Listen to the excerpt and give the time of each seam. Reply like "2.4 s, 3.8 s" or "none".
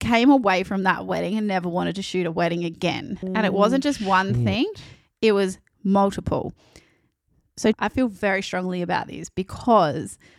3.2 s, 7.7 s